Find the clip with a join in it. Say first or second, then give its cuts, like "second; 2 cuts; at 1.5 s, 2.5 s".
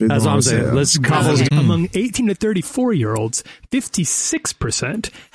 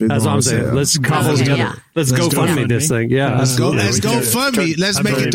first; 1 cut; at 1.5 s